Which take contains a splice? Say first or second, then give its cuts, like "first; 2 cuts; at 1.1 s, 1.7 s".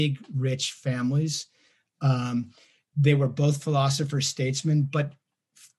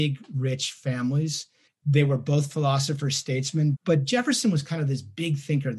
second; 2 cuts; at 1.7 s, 3.7 s